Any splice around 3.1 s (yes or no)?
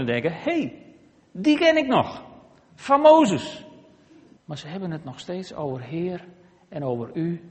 no